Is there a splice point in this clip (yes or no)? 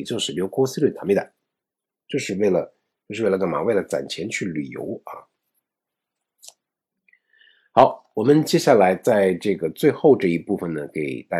no